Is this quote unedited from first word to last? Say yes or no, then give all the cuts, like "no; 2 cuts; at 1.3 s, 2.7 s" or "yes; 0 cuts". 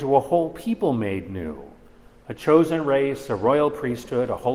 yes; 0 cuts